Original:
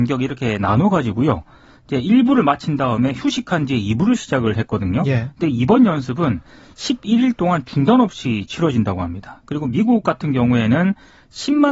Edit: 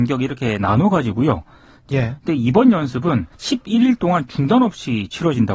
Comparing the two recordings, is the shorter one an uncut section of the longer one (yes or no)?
no